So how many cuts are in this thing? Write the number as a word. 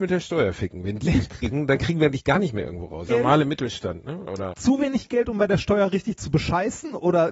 two